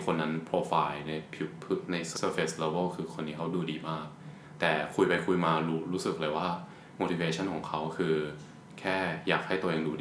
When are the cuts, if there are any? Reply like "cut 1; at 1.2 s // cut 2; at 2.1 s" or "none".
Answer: cut 1; at 2.1 s